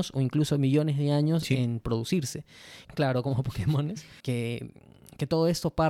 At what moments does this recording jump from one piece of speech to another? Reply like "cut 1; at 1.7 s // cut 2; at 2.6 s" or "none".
cut 1; at 2.8 s // cut 2; at 4.2 s